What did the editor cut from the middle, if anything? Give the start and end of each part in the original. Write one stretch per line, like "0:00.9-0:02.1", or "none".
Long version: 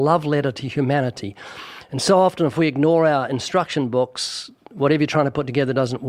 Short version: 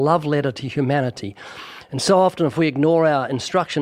none

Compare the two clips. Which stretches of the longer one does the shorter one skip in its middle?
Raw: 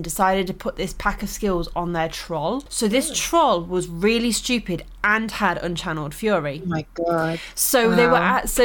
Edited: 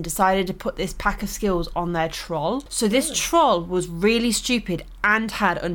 none

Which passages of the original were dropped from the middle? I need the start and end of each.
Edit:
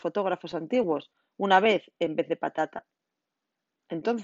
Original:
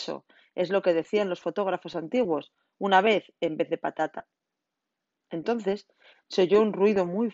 none

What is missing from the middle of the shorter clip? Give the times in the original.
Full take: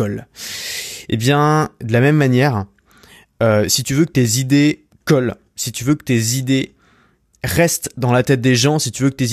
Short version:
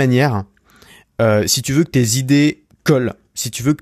none

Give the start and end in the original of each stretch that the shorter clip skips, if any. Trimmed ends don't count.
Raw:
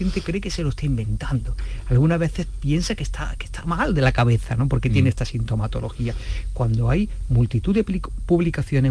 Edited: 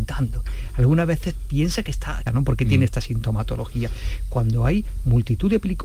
0:03.4-0:04.5

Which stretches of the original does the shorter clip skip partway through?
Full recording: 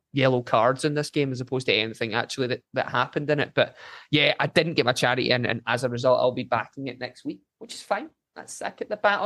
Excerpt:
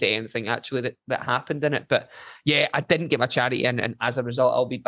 none

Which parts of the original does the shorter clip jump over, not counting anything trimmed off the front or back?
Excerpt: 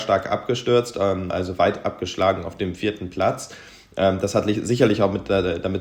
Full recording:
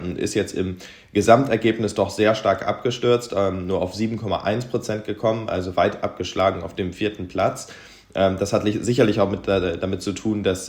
0:03.6-0:05.5

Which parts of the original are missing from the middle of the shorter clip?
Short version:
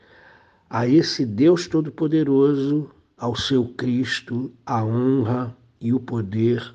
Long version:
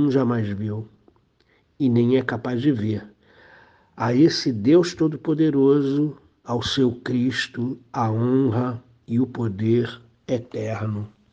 none

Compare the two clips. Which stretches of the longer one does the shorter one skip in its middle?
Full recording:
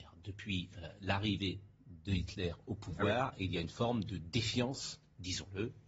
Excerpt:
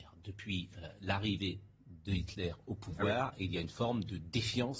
none

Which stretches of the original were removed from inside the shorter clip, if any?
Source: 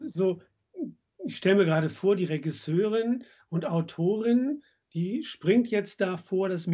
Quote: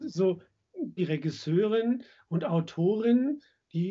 0:01.0-0:02.2

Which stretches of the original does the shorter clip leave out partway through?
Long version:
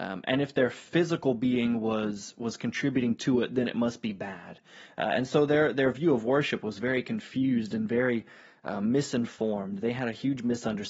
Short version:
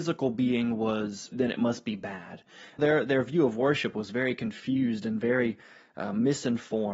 0:02.3-0:03.5
0:05.0-0:05.5

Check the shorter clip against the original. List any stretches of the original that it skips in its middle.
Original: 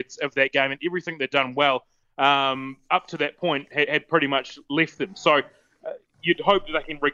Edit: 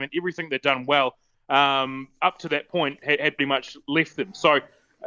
0:04.1-0:04.2

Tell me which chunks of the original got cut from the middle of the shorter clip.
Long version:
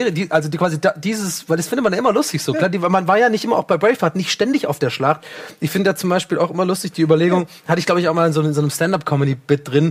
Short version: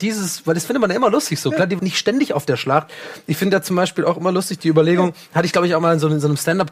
0:02.8-0:04.1

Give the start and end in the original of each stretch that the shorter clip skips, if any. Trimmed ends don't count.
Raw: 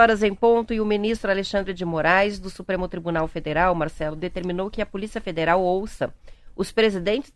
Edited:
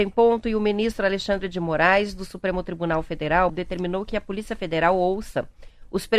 0:03.7-0:04.1

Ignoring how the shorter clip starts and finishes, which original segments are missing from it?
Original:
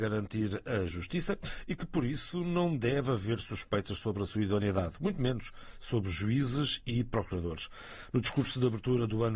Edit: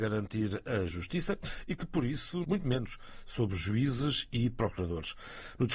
0:02.4-0:05.0

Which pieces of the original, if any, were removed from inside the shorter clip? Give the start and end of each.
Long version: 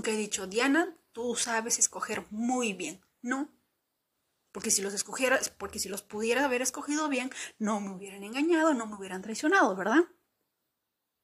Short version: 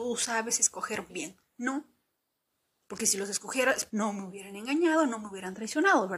0:02.3-0:02.7
0:05.5-0:07.6

